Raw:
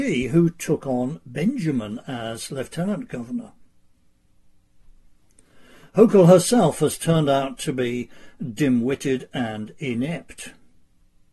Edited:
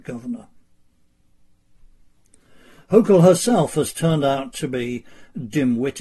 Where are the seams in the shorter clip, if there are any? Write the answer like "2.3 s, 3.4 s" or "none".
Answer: none